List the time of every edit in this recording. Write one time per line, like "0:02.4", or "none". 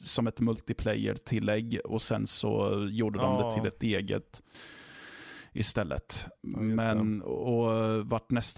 none